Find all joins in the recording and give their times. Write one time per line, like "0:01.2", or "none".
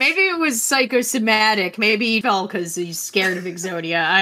0:02.2